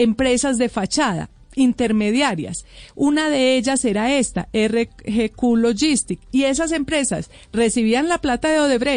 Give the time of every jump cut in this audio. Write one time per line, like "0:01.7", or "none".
none